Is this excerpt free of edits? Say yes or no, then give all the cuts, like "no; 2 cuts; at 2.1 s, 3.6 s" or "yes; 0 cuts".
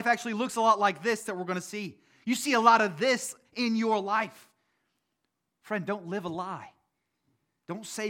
yes; 0 cuts